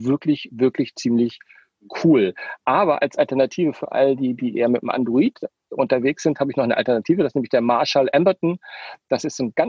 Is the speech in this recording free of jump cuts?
yes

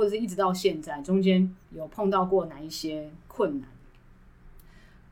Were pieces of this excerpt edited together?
yes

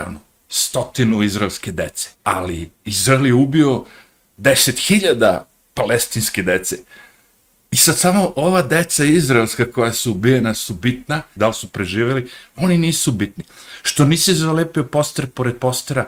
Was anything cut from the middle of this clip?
yes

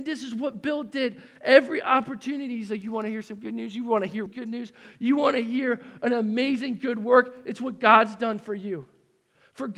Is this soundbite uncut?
no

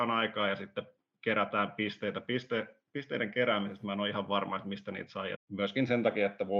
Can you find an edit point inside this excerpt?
yes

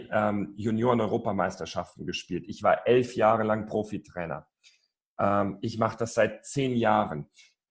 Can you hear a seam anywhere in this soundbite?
no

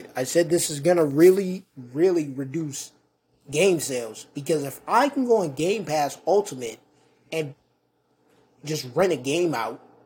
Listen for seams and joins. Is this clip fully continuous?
yes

